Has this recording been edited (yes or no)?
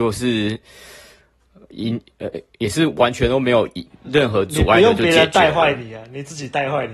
no